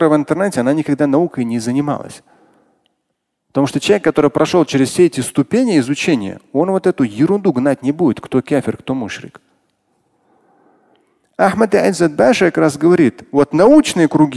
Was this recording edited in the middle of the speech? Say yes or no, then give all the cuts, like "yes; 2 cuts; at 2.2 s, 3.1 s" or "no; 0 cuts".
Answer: no; 0 cuts